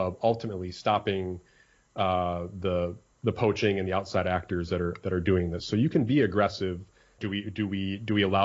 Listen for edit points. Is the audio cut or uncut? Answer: cut